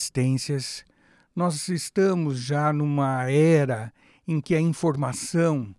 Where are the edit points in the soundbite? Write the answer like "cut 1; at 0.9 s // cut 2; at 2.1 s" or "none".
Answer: none